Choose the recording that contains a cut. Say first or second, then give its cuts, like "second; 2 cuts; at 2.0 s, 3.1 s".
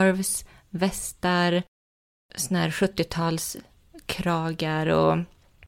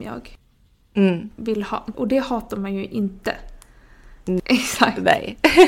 second; 2 cuts; at 1.9 s, 4.4 s